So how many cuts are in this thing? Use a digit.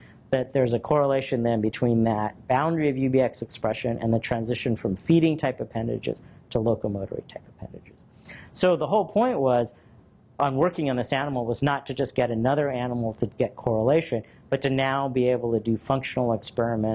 0